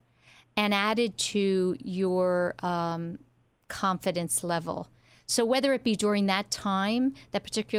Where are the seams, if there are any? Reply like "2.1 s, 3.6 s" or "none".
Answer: none